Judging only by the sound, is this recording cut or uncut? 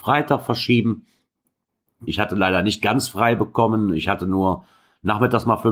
cut